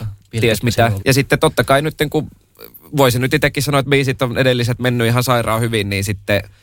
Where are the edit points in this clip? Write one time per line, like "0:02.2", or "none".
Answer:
0:01.0